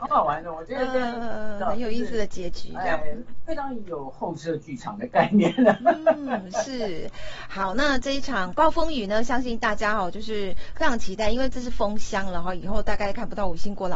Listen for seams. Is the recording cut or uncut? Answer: uncut